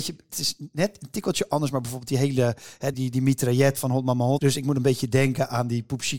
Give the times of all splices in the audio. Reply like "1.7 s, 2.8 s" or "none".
2.9 s, 4.4 s